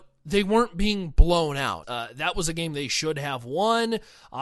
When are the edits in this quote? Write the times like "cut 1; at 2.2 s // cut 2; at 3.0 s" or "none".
cut 1; at 1.8 s